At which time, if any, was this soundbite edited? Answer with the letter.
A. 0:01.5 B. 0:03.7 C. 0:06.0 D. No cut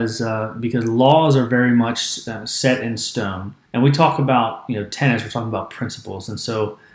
B